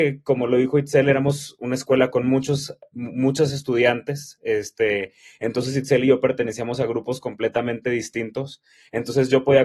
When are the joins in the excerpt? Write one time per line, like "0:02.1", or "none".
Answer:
none